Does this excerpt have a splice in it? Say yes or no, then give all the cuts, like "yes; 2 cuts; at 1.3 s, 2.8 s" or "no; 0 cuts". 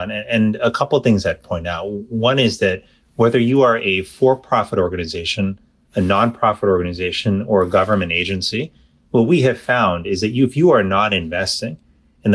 no; 0 cuts